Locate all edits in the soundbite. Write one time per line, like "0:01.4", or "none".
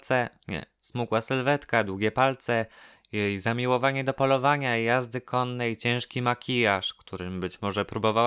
none

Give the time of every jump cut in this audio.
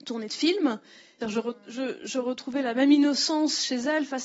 0:01.2

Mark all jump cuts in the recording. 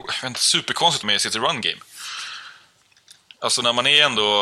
0:01.0

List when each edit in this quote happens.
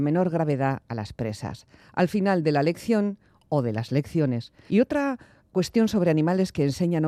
0:04.7

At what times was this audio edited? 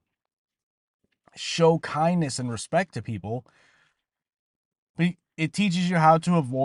none

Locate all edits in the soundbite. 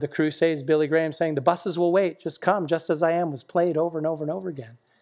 none

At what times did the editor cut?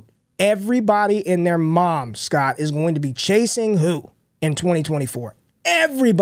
none

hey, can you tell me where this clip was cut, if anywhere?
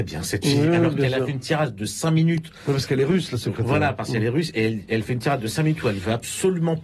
none

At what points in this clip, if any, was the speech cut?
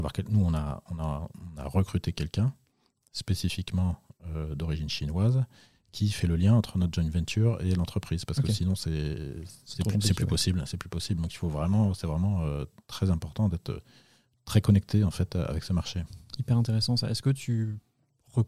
none

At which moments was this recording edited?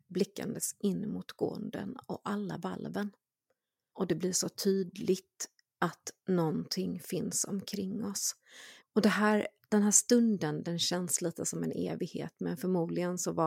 0:03.9
0:08.8

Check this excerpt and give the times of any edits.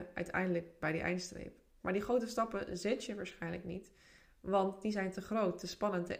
0:01.8

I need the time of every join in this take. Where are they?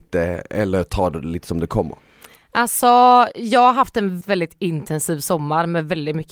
0:04.2

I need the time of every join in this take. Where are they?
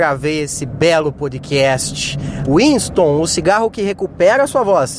0:02.5

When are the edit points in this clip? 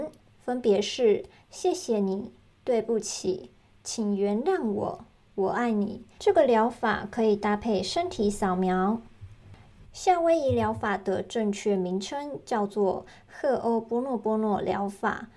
0:06.2
0:09.8

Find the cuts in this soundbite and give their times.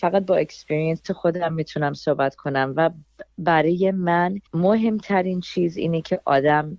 0:04.5

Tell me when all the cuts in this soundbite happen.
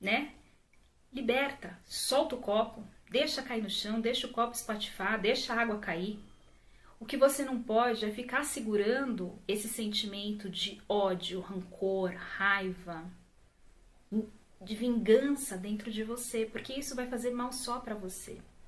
none

